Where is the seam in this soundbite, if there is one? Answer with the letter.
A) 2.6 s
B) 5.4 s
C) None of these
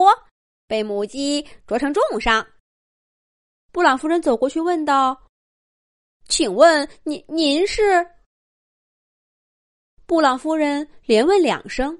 A